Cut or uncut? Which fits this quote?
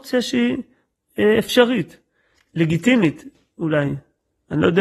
cut